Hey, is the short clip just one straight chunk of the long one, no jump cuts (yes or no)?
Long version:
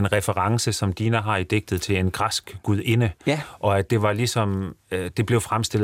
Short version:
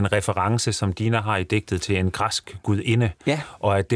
yes